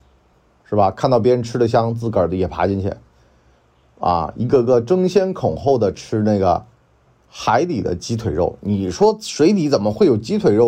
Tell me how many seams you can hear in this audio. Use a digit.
0